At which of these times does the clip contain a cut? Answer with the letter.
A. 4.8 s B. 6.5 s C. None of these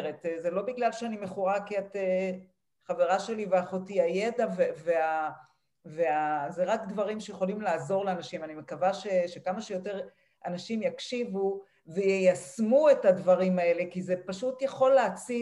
C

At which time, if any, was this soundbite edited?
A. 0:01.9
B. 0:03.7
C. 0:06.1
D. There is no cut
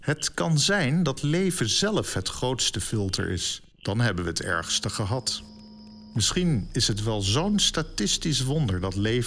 B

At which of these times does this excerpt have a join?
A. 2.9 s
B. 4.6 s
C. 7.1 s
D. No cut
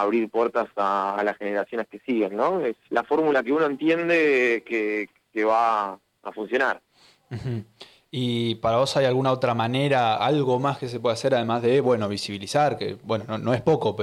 A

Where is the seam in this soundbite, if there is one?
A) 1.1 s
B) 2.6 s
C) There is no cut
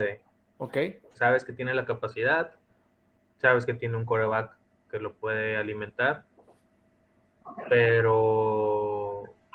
A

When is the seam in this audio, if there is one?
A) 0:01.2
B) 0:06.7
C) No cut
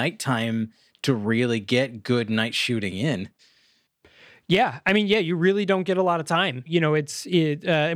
B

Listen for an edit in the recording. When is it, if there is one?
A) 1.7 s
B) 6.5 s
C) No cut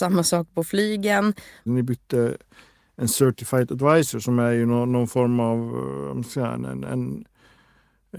A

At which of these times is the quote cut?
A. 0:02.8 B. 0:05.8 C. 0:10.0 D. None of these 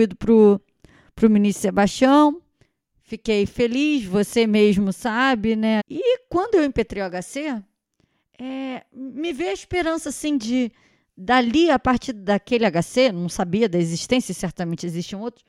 B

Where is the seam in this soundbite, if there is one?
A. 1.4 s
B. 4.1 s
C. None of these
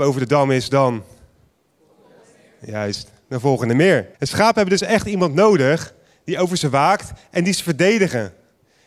B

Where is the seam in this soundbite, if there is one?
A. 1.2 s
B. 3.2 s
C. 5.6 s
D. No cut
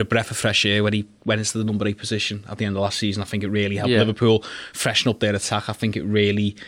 D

